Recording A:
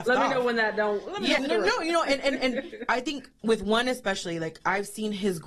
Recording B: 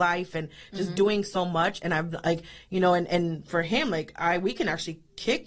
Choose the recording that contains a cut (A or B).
A